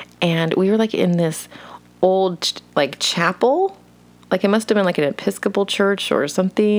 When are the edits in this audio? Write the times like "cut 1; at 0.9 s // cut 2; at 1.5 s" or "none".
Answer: none